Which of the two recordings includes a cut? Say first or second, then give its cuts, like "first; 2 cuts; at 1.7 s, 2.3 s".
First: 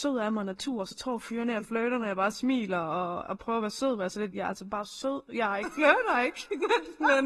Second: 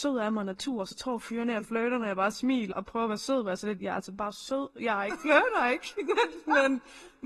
second; 1 cut; at 2.7 s